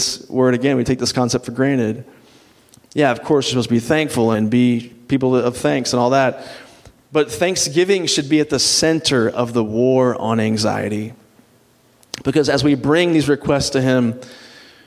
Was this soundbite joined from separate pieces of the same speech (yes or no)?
yes